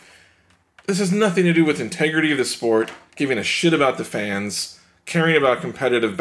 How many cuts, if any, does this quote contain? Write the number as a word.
zero